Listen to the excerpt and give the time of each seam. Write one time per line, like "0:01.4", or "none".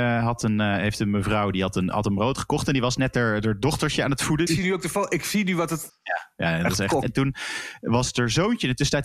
0:04.5
0:05.9
0:07.0